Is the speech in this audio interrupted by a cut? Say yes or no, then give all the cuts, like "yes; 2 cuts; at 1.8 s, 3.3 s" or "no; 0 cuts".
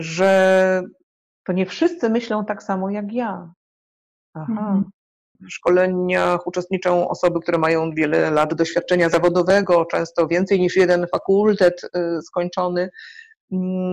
yes; 1 cut; at 5.4 s